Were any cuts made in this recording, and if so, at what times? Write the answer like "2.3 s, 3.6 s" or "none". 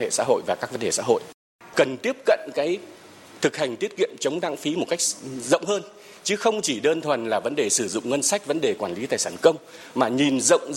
1.6 s